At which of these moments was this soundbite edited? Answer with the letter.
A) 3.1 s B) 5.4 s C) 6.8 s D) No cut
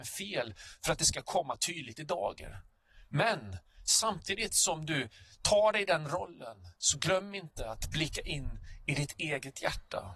C